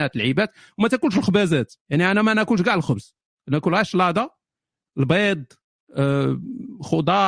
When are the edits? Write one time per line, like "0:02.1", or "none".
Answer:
0:01.8